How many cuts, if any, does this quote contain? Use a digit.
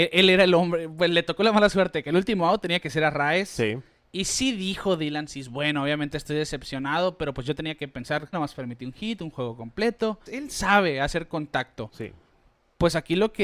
2